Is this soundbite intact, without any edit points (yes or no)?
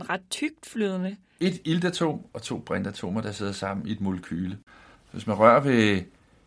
no